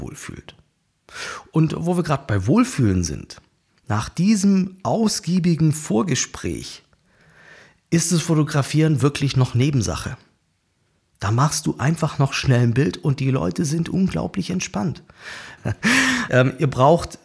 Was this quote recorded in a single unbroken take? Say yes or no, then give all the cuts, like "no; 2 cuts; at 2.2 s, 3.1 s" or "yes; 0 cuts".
no; 1 cut; at 15.6 s